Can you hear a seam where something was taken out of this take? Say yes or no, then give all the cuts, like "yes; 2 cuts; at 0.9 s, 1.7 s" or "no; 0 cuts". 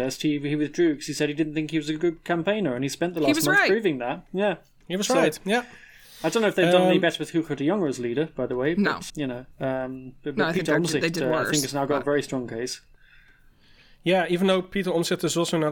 yes; 1 cut; at 9.1 s